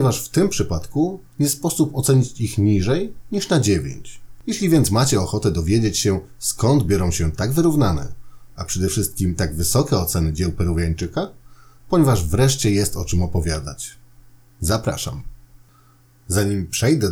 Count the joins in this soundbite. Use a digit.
1